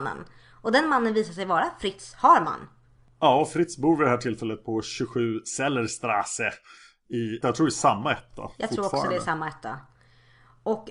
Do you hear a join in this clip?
yes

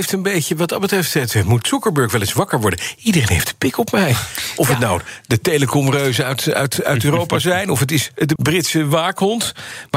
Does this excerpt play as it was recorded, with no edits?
no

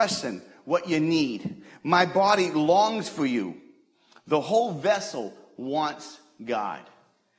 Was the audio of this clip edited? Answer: no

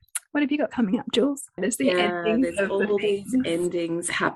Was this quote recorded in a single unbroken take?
no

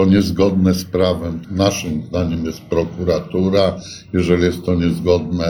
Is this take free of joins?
no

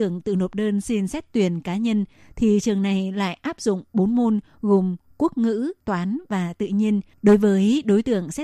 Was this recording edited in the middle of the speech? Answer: yes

